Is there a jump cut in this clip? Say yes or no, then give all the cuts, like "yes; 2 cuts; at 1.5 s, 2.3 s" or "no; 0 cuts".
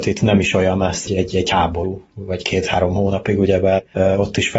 yes; 1 cut; at 1.1 s